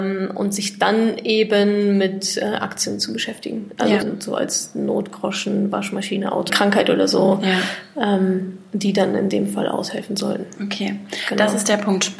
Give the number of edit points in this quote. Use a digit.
2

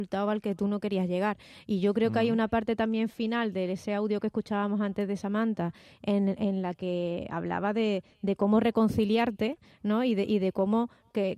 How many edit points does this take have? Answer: 0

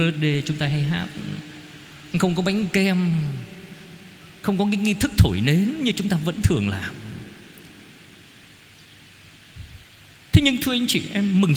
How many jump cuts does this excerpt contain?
0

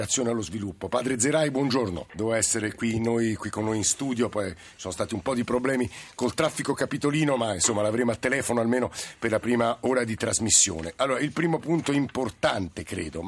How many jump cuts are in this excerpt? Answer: 1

